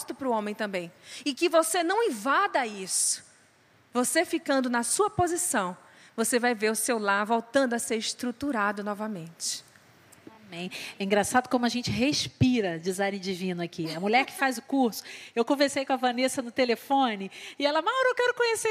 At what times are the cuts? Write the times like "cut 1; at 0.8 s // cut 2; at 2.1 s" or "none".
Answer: none